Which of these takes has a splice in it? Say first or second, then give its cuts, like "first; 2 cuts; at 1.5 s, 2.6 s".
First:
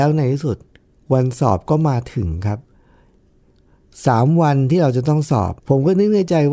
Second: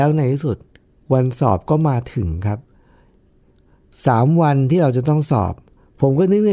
first; 1 cut; at 5.6 s